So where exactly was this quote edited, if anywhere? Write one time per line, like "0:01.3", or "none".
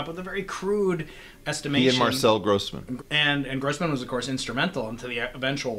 0:03.0